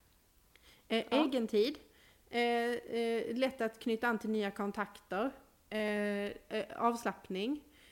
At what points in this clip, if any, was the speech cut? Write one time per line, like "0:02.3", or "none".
none